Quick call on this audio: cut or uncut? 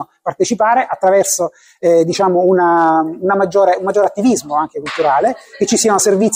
uncut